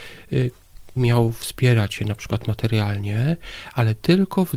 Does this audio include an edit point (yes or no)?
yes